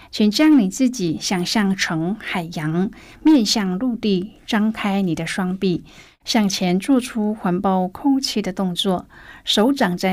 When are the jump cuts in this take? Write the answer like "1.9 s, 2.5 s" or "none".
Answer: none